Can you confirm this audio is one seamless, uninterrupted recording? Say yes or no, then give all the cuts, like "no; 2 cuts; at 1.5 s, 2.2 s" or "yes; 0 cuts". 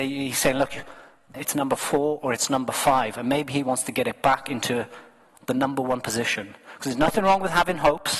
no; 1 cut; at 1.3 s